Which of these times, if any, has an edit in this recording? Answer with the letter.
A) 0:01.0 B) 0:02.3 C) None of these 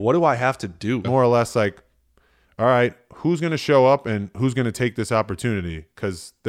A